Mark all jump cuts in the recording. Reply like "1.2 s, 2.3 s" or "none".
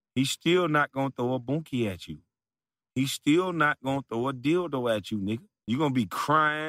5.6 s